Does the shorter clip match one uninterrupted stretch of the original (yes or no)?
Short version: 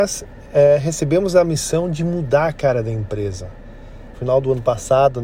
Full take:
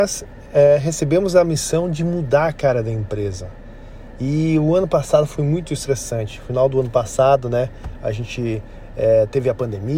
no